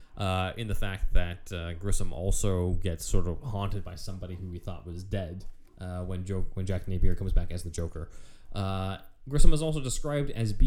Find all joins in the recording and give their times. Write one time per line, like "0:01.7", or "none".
none